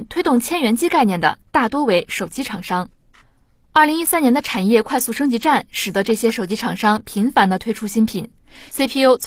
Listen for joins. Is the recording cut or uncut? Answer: uncut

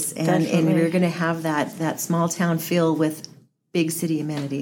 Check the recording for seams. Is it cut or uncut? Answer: uncut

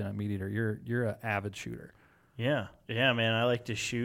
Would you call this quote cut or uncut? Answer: uncut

